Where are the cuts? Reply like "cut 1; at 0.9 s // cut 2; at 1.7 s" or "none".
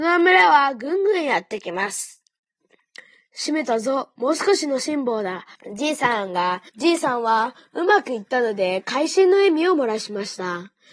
cut 1; at 5.5 s // cut 2; at 6.7 s